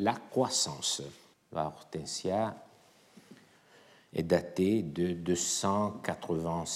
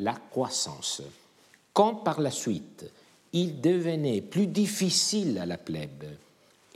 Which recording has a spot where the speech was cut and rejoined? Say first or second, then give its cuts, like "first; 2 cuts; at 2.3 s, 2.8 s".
first; 1 cut; at 1.3 s